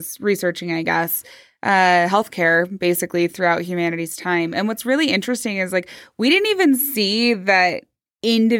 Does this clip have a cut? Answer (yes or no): no